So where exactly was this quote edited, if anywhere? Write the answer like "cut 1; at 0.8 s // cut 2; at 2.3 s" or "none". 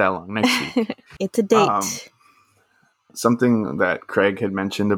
cut 1; at 3.1 s

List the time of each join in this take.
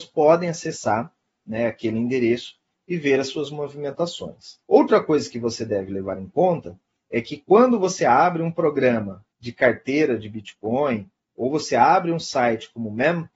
cut 1; at 4.6 s // cut 2; at 9.3 s

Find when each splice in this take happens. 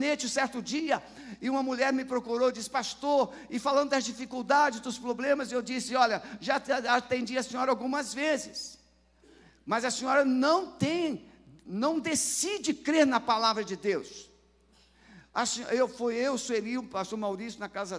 none

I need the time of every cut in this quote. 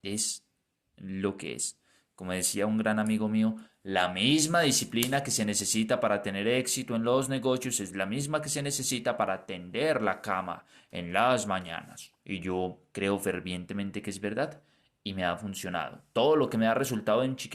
cut 1; at 12.2 s

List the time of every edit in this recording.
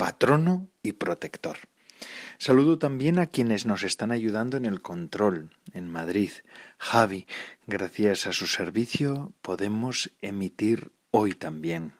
none

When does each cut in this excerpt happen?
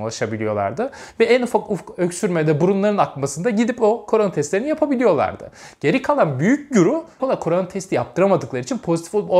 cut 1; at 7.2 s

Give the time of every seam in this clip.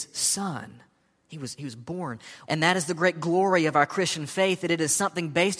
cut 1; at 2.5 s

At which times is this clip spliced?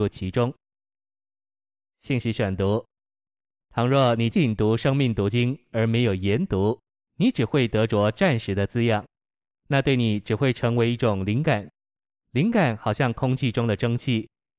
cut 1; at 4.3 s

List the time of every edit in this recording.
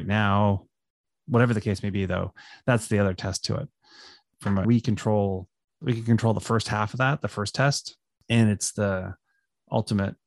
cut 1; at 4.6 s

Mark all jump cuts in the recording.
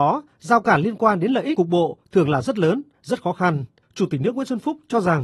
cut 1; at 3.8 s

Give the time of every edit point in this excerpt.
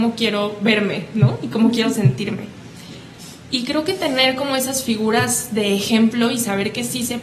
none

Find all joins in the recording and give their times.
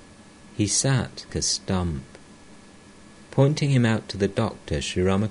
cut 1; at 1.3 s

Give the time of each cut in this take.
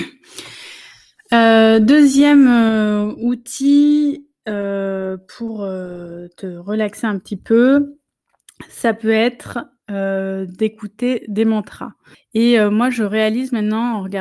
cut 1; at 12.1 s

